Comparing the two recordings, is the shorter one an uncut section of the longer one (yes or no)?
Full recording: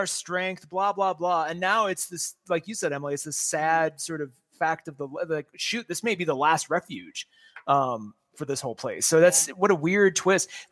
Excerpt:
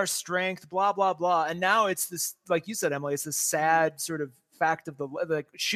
yes